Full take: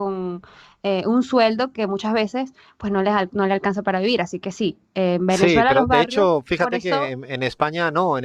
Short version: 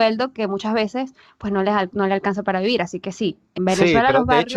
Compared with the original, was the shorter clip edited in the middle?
yes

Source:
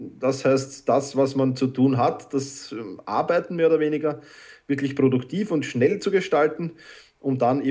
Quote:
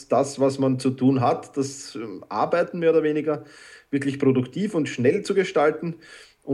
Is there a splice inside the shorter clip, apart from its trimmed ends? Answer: no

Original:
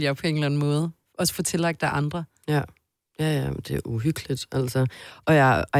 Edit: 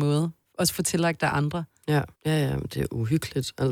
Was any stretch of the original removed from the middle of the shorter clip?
yes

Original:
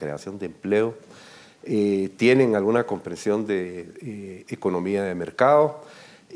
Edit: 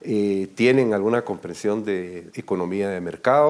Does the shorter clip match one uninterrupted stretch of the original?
no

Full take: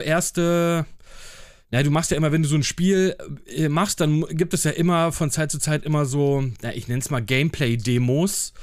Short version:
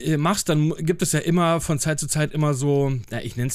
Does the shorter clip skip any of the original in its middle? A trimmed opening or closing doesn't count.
no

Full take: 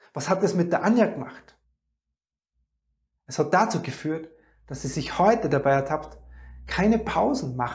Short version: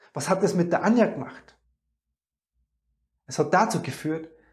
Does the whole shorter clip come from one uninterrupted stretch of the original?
yes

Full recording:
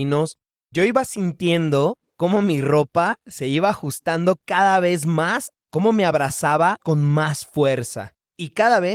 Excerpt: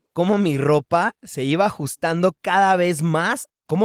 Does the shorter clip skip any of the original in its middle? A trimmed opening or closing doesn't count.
no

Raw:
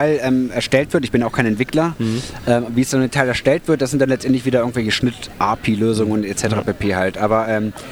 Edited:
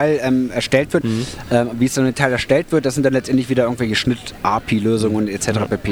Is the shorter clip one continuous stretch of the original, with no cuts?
no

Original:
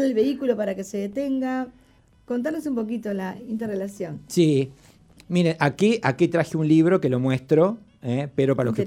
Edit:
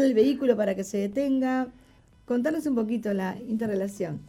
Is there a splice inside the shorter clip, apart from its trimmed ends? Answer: no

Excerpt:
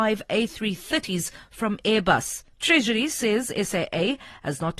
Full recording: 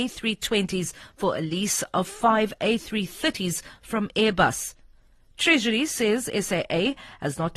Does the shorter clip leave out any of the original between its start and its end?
yes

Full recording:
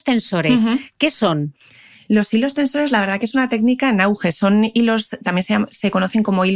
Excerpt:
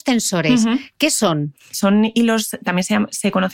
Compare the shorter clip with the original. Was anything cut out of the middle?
yes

